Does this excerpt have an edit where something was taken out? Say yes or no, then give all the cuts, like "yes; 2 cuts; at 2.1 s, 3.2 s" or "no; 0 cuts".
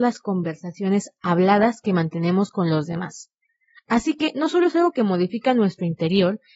no; 0 cuts